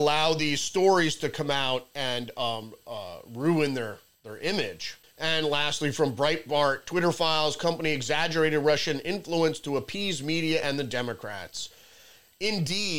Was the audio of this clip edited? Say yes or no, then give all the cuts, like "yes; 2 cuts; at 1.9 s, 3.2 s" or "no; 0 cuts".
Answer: no; 0 cuts